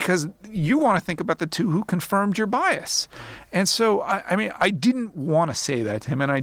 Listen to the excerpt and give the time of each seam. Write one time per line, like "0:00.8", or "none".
0:04.6